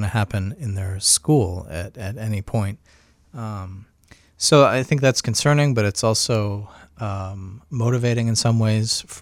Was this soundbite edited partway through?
no; 0 cuts

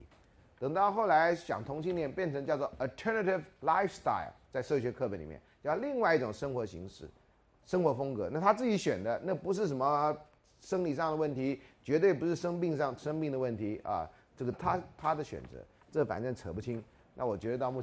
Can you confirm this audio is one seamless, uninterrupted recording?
no; 2 cuts; at 14.5 s, 15.8 s

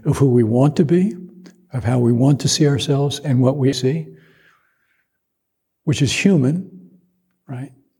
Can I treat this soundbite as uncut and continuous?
no; 1 cut; at 3.7 s

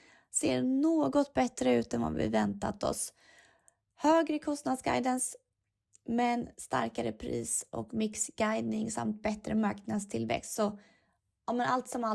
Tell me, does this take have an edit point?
no; 0 cuts

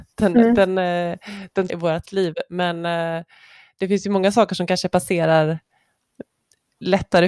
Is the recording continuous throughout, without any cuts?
no; 1 cut; at 1.7 s

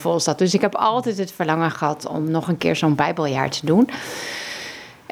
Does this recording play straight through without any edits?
yes; 0 cuts

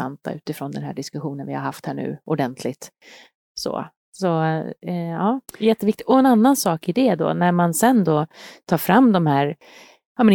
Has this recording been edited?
yes; 1 cut; at 5.5 s

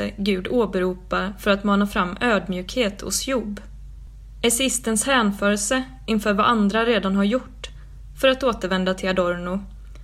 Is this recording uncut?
yes; 0 cuts

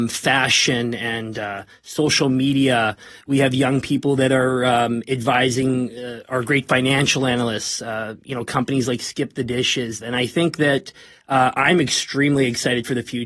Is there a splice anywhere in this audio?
yes; 1 cut; at 10.0 s

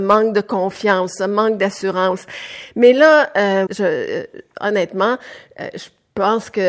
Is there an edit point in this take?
yes; 1 cut; at 3.7 s

